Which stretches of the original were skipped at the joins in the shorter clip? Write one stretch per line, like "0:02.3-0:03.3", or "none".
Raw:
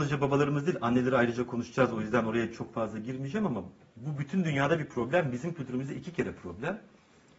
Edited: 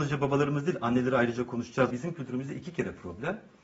0:01.9-0:05.3